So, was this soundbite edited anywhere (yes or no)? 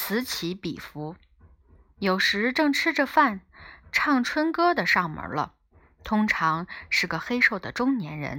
no